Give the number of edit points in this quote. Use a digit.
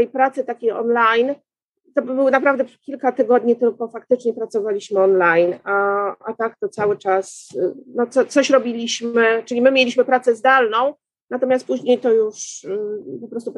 0